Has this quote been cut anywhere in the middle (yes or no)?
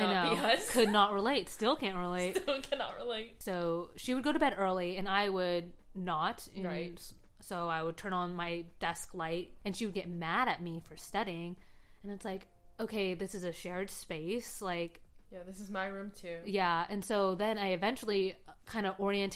no